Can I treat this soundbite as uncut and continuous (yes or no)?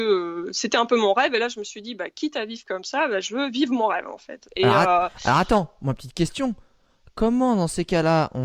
yes